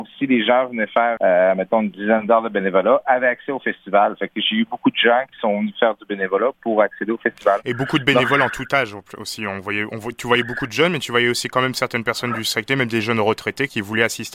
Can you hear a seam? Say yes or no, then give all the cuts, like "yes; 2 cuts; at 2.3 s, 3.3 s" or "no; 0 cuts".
yes; 1 cut; at 1.2 s